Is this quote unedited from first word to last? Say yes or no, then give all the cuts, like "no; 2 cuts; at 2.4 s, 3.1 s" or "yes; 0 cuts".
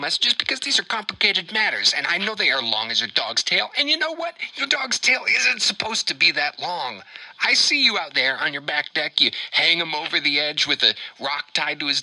yes; 0 cuts